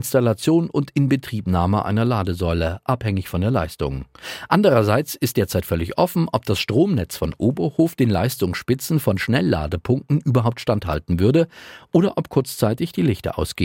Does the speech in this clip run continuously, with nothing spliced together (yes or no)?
yes